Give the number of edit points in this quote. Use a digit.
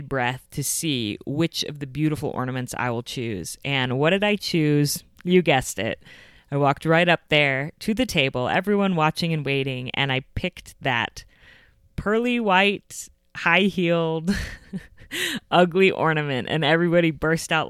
0